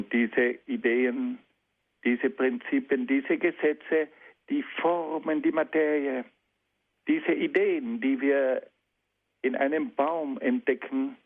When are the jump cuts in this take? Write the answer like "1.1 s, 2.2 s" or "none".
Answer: 7.0 s